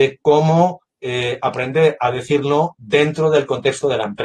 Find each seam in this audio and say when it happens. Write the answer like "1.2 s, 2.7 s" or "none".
none

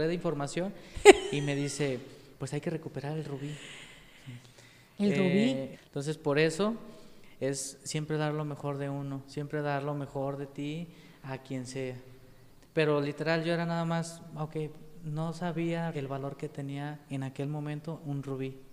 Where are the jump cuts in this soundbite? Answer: 5.7 s, 12.6 s, 15.9 s

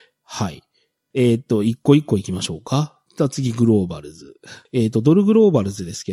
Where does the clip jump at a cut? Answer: 1.1 s, 4.7 s

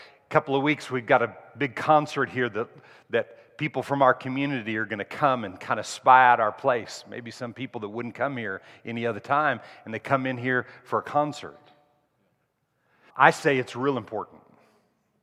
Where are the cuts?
13.1 s

